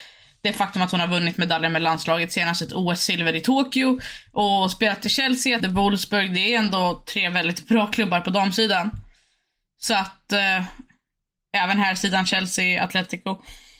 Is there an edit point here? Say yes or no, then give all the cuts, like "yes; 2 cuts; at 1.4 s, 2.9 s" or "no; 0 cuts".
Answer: yes; 1 cut; at 5.6 s